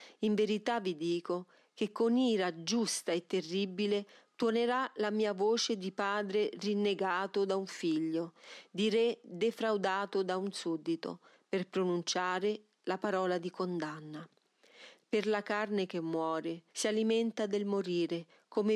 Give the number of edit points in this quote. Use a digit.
2